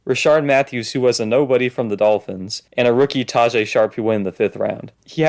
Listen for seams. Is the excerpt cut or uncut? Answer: uncut